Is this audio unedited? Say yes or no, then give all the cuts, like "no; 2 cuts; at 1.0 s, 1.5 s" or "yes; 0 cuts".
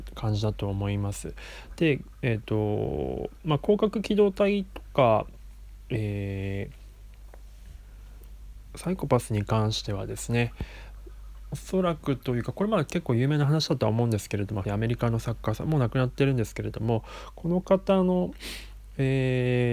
no; 1 cut; at 14.6 s